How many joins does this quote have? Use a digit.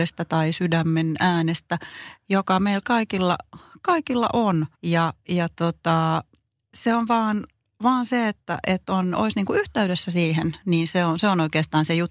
1